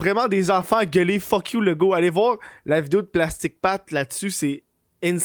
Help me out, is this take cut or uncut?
uncut